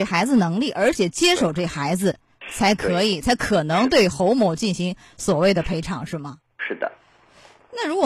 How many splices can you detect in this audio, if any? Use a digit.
0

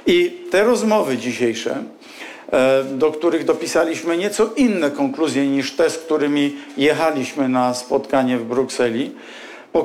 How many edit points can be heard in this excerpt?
0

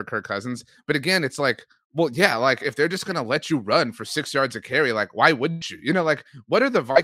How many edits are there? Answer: 0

